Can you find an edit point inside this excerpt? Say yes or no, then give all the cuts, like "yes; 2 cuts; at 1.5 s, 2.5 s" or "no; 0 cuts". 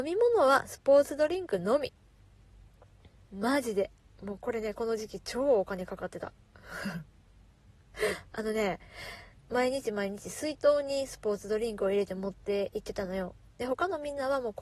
yes; 1 cut; at 9.4 s